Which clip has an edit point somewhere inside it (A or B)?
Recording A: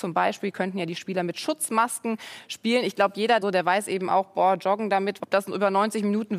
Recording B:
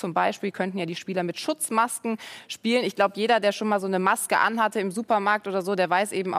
A